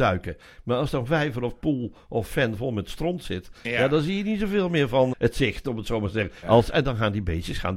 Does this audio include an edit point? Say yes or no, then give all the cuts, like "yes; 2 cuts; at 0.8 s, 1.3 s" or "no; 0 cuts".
yes; 2 cuts; at 5.1 s, 6.4 s